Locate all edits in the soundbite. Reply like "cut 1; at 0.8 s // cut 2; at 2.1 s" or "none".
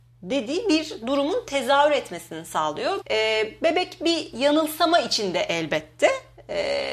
cut 1; at 3.0 s